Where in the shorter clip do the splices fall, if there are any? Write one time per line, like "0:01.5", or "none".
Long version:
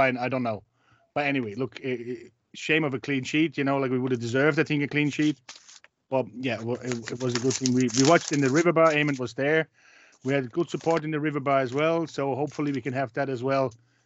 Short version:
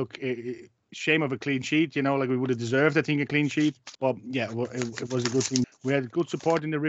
0:03.9
0:05.6